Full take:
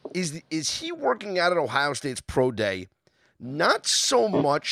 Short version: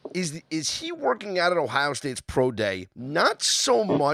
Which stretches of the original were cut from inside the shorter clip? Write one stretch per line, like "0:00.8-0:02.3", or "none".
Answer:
0:02.9-0:03.4